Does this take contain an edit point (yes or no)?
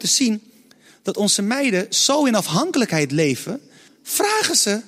yes